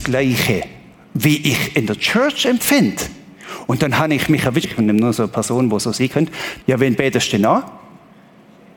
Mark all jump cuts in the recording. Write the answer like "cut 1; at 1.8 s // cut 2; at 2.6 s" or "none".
cut 1; at 4.6 s // cut 2; at 6.6 s